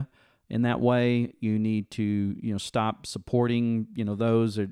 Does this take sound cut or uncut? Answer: uncut